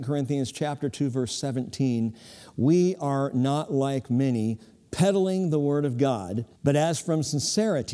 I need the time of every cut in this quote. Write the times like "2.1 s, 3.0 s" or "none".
6.5 s